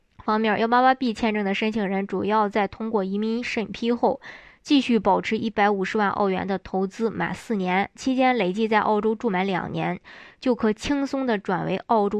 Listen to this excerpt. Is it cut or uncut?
uncut